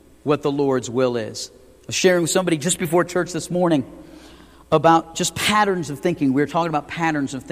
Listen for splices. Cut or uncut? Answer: uncut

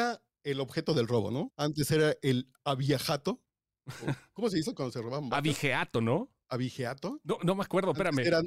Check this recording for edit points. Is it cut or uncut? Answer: cut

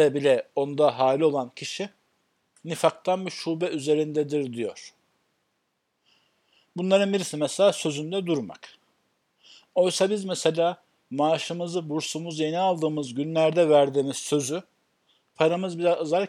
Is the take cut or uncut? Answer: uncut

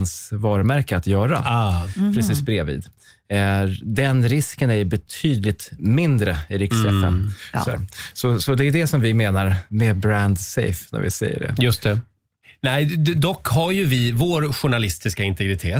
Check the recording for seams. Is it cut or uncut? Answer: cut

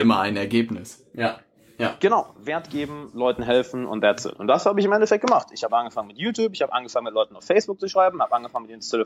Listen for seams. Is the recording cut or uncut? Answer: uncut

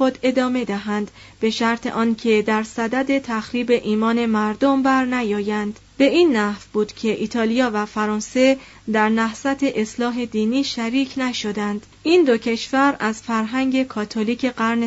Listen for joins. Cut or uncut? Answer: cut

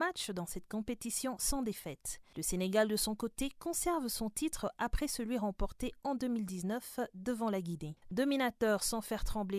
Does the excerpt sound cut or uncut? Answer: cut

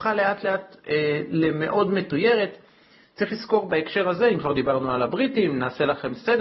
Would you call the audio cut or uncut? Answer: uncut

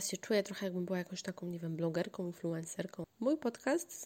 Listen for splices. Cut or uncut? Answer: cut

